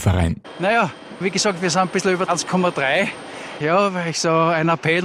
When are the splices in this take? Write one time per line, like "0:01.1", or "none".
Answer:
0:01.2
0:03.6